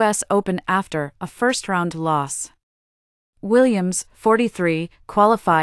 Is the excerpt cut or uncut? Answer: uncut